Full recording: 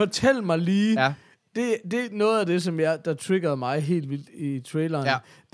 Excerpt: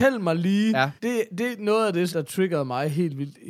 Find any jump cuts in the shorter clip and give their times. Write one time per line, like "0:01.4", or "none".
0:01.0
0:02.1